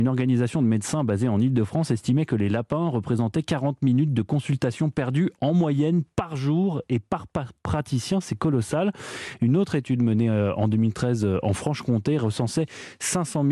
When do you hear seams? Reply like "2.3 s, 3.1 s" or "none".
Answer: none

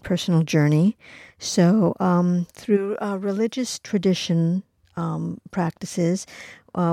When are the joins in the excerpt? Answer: none

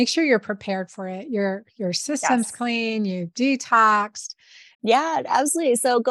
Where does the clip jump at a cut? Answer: 4.7 s

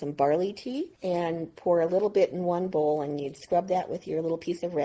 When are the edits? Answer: 1.0 s

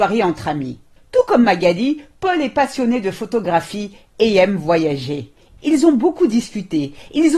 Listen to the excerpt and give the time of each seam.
1.0 s, 5.6 s

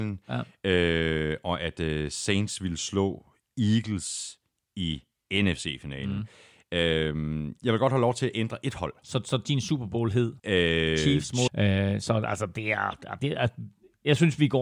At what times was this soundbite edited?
10.4 s, 11.5 s, 13.2 s

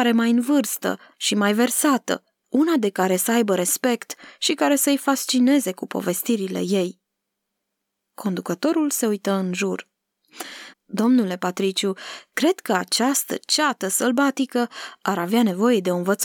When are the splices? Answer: 10.7 s

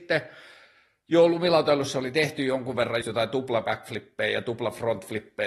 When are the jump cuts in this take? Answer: 3.0 s

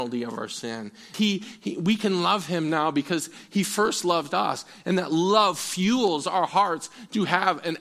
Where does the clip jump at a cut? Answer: 1.1 s

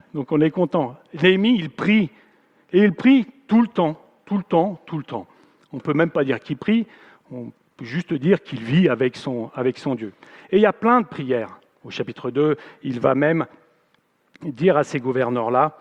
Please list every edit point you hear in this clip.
11.8 s

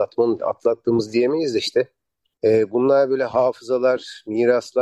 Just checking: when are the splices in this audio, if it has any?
2.3 s

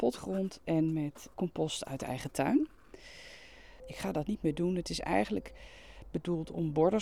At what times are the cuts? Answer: 1.3 s, 3.8 s

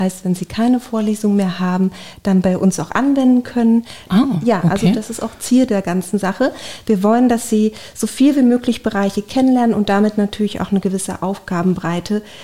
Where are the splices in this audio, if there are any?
4.1 s

